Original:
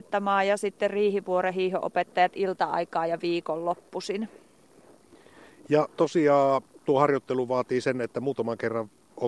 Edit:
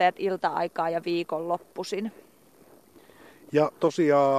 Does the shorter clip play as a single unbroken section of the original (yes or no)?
yes